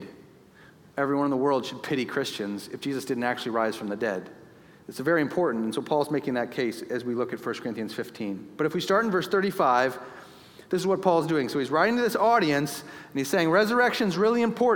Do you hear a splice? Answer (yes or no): no